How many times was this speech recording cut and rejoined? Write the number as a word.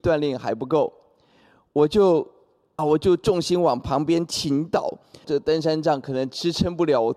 two